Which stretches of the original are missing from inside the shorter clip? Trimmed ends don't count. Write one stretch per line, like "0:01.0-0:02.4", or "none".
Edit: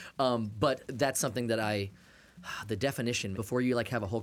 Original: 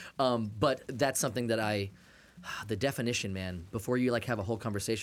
0:03.3-0:03.7